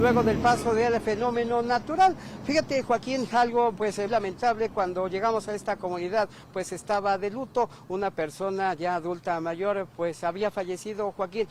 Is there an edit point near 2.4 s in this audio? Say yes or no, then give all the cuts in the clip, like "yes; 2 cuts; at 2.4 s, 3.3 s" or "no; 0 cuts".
no; 1 cut; at 4.1 s